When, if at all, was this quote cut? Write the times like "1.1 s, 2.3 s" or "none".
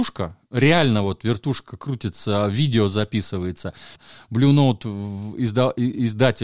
4.0 s